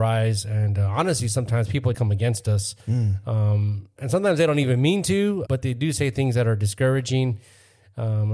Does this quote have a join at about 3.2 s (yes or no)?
no